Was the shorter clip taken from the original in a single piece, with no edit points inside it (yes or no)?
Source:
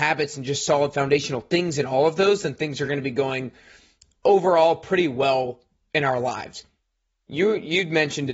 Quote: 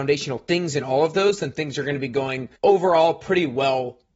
no